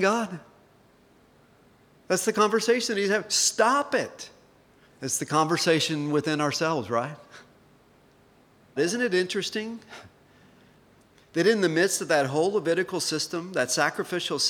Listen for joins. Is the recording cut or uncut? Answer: cut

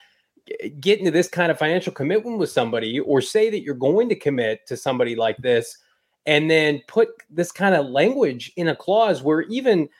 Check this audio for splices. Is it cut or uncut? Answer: uncut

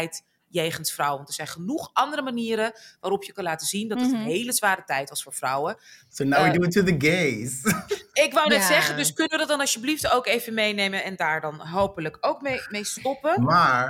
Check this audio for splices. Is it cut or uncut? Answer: uncut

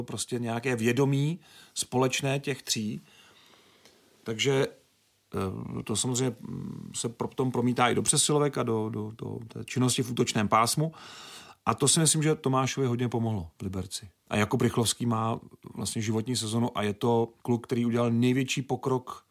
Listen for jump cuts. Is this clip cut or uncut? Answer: cut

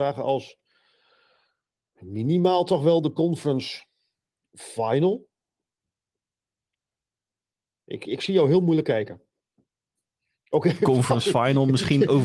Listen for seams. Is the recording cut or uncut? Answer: cut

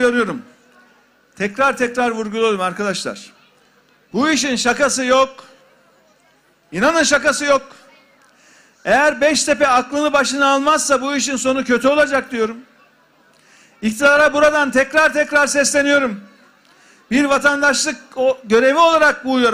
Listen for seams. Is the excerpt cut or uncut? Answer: uncut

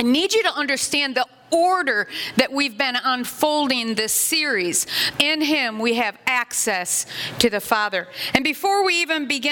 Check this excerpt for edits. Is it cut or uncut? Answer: cut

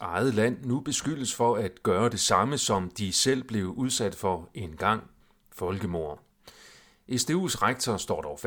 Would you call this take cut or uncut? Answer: uncut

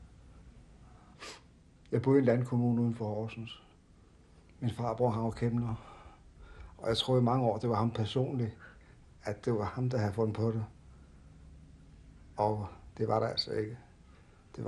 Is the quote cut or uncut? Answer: uncut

